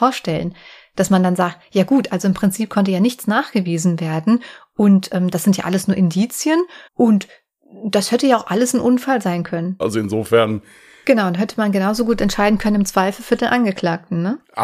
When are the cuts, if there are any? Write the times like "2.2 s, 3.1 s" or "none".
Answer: 6.9 s, 9.8 s